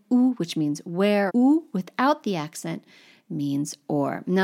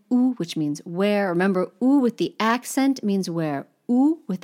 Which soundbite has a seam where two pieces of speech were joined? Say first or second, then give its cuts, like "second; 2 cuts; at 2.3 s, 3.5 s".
first; 1 cut; at 1.3 s